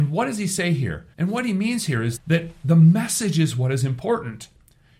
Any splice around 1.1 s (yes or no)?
yes